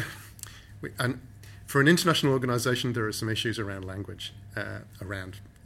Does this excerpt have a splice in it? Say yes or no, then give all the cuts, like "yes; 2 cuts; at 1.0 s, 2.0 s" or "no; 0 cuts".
no; 0 cuts